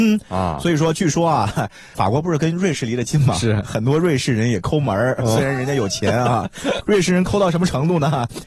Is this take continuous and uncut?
yes; 0 cuts

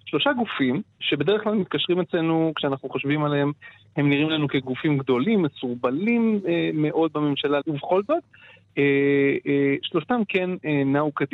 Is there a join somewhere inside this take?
yes; 1 cut; at 7.6 s

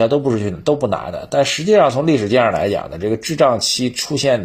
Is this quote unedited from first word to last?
yes; 0 cuts

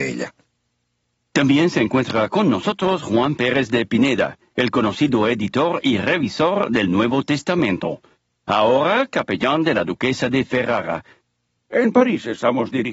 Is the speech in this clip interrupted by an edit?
yes; 1 cut; at 11.6 s

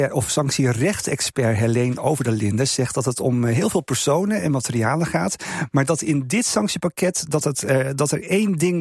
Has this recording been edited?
yes; 1 cut; at 7.4 s

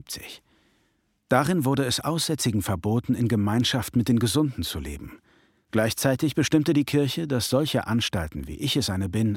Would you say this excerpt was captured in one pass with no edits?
yes; 0 cuts

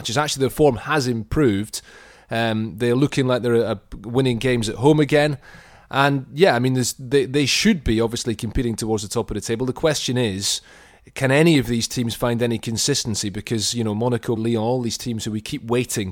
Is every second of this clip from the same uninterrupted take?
no; 1 cut; at 14.4 s

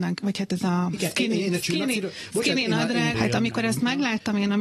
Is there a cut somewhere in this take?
yes; 1 cut; at 3.1 s

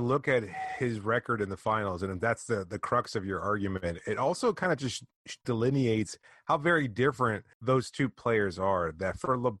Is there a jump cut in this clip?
yes; 2 cuts; at 5.4 s, 7.5 s

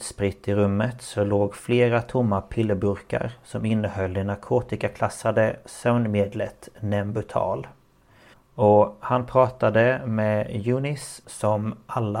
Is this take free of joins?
no; 2 cuts; at 8.3 s, 11.2 s

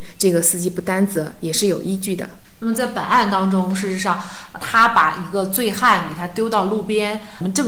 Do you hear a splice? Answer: no; 0 cuts

